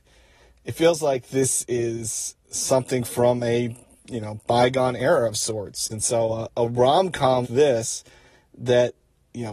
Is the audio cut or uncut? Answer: cut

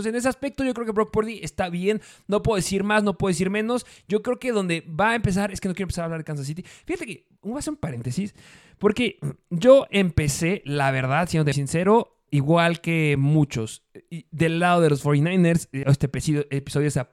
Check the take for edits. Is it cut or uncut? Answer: cut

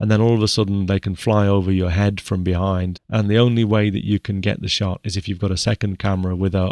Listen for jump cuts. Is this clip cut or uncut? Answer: cut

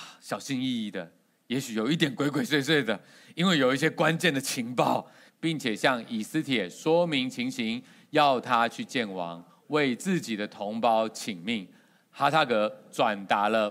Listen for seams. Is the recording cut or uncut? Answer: cut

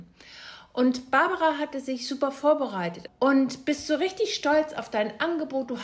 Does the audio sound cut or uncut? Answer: cut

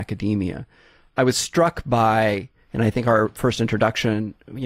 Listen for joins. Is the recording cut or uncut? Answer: uncut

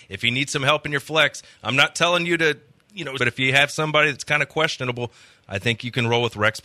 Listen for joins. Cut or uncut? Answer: cut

